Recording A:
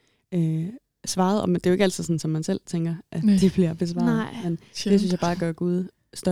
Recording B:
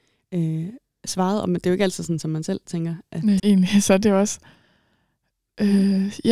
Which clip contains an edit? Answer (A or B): B